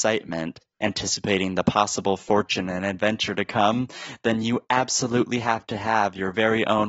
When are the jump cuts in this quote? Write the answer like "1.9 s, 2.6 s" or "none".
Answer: none